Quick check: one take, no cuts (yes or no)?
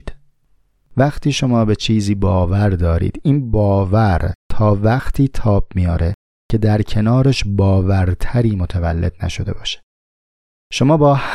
yes